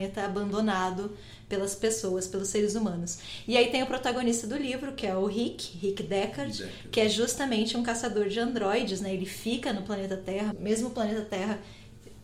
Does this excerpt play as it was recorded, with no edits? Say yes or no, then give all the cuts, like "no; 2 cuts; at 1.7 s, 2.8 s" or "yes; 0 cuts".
no; 1 cut; at 10.5 s